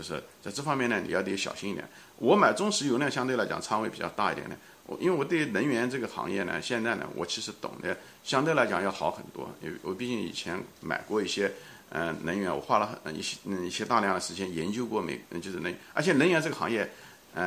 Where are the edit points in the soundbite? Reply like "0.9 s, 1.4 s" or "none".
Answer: none

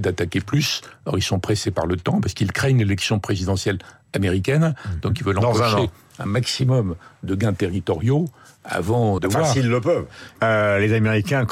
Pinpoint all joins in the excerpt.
9.2 s, 10.4 s

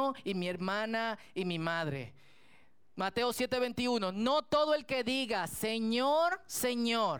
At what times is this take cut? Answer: none

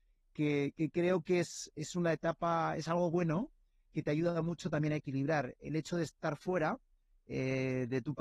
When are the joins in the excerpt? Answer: none

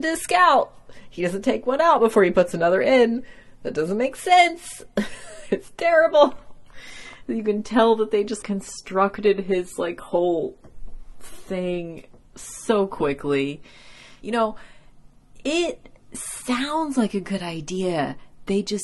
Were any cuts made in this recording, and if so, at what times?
8.4 s, 14.2 s

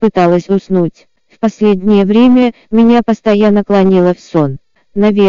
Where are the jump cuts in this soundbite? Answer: none

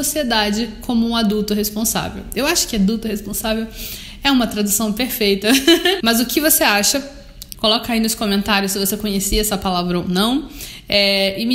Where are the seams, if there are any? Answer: 6.0 s, 7.5 s

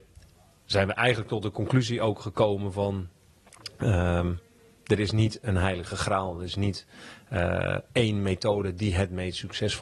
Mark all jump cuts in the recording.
none

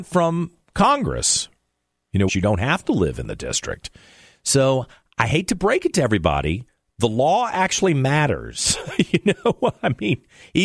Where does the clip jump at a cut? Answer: 2.3 s

